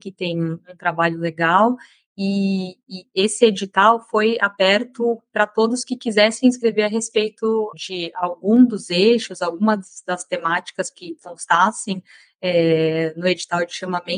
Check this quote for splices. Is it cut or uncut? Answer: uncut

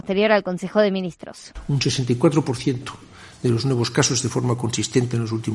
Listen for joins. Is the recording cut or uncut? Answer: uncut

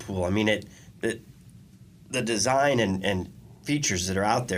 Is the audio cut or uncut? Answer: uncut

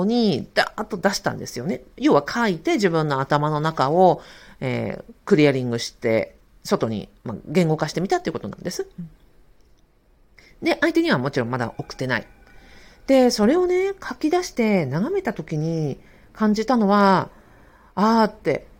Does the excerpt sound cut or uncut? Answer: uncut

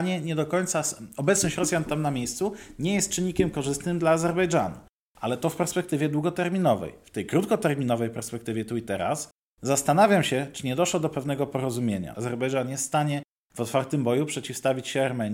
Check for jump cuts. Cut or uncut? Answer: cut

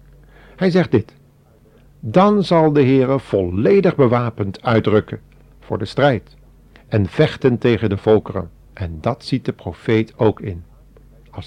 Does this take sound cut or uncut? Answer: cut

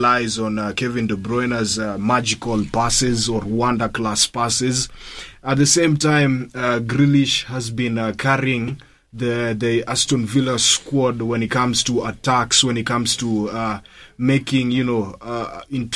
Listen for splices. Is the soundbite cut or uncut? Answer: uncut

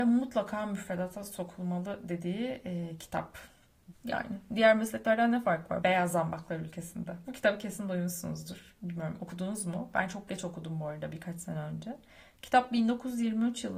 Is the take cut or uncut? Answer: cut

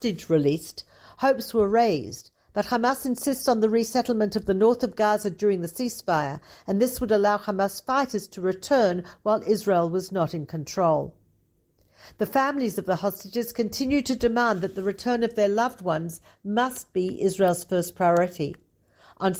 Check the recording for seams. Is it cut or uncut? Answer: uncut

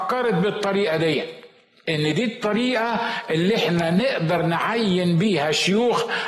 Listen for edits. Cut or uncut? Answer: uncut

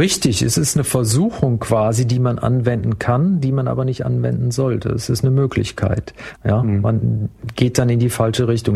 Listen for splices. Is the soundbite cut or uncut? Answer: cut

